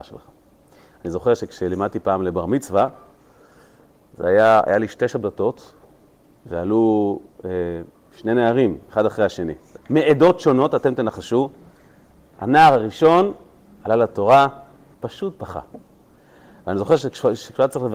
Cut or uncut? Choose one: cut